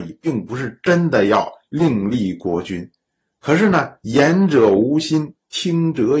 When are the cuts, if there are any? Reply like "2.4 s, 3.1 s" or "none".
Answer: none